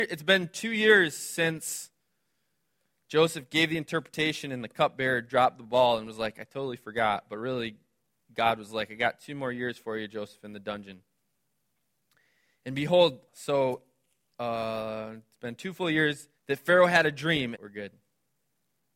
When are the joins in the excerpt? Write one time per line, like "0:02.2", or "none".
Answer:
0:13.3
0:16.4
0:17.5

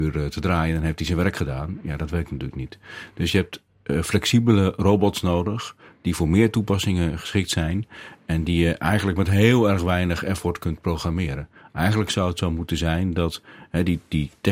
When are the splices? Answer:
none

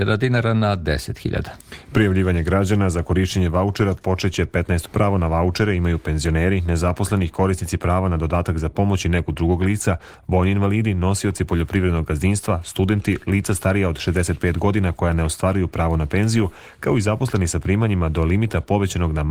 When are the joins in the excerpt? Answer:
0:04.9

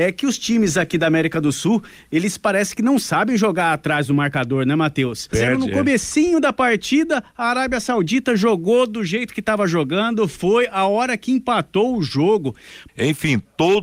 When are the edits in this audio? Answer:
0:05.3
0:12.9

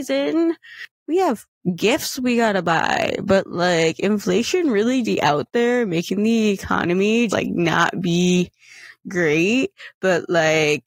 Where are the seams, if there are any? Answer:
0:01.0
0:05.0
0:07.3

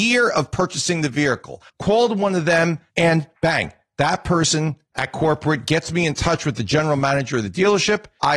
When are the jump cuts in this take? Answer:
0:01.7
0:02.9

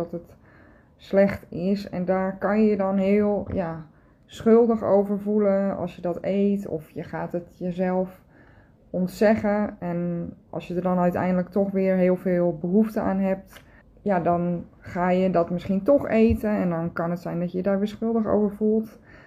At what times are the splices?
0:13.8

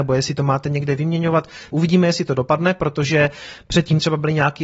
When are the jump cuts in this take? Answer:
0:01.7

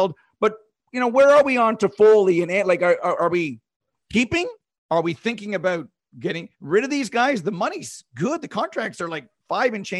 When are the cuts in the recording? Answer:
none

